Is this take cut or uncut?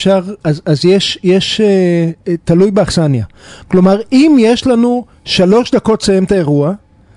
uncut